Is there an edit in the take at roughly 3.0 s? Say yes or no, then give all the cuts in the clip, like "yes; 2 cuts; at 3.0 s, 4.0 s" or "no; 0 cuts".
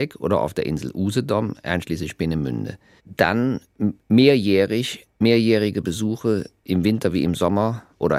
yes; 2 cuts; at 3.0 s, 5.1 s